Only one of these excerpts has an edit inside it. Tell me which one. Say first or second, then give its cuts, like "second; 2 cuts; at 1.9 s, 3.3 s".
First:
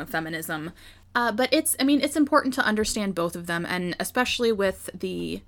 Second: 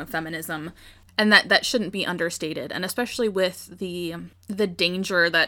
second; 1 cut; at 1.1 s